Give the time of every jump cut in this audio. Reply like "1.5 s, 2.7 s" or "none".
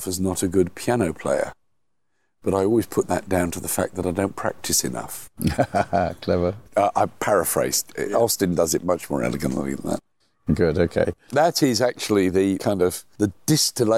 11.3 s